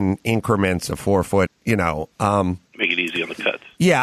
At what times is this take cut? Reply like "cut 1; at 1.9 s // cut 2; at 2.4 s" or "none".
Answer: cut 1; at 1.5 s // cut 2; at 2.7 s